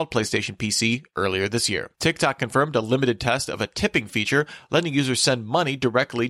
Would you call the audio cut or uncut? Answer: cut